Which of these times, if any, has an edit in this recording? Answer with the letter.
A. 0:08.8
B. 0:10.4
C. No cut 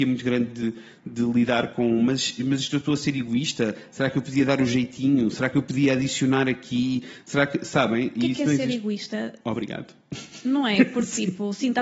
C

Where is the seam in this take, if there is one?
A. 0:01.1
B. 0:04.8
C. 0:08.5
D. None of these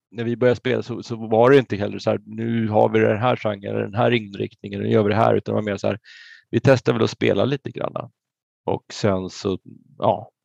D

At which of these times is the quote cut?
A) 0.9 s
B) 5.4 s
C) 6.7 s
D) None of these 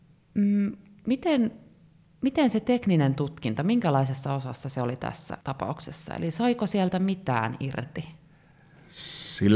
B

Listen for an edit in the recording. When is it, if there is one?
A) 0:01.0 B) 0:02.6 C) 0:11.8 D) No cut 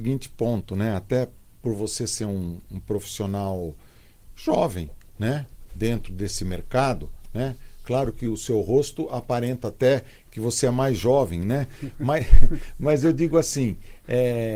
D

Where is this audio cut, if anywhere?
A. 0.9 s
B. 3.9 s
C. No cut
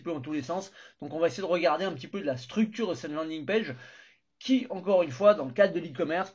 C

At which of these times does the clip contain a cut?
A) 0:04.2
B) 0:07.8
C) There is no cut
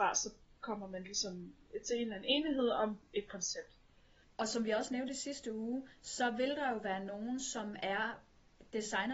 A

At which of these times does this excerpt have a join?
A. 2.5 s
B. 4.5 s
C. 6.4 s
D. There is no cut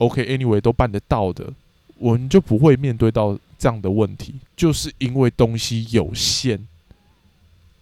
B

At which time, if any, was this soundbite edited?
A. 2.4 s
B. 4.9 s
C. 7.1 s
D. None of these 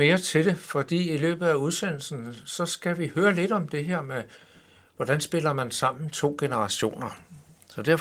D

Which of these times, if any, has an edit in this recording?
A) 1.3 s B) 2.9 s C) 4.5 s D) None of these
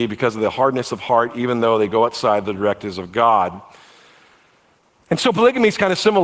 D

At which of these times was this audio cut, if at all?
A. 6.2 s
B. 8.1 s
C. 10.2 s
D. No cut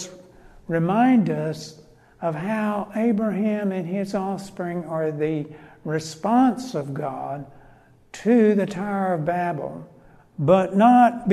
C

